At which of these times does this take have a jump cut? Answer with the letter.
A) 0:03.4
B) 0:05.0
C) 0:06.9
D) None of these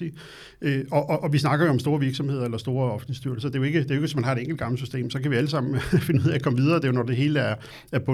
D